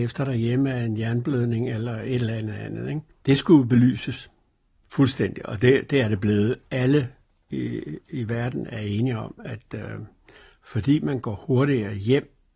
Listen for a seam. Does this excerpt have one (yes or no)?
no